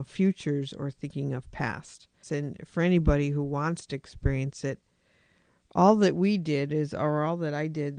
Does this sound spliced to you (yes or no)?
yes